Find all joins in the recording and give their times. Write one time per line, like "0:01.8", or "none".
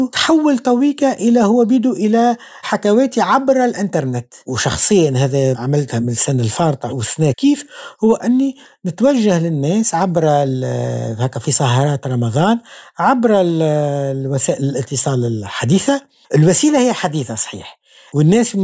0:07.3
0:16.2